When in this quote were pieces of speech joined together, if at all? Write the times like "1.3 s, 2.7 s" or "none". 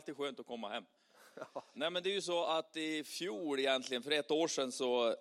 1.7 s